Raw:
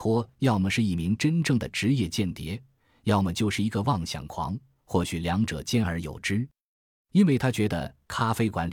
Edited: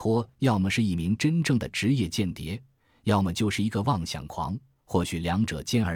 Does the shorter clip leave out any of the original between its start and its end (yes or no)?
no